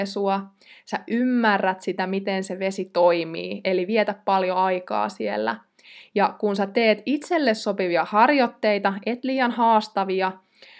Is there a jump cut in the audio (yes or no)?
no